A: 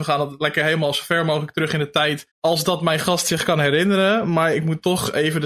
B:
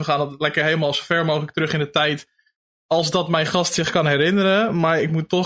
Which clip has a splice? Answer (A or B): A